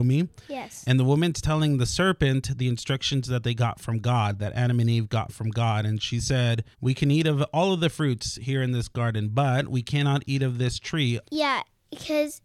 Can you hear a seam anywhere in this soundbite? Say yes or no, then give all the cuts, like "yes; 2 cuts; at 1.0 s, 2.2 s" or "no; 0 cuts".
yes; 2 cuts; at 6.7 s, 11.2 s